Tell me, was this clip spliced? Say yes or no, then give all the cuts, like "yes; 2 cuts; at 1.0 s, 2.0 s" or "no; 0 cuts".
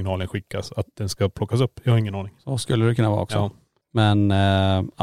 no; 0 cuts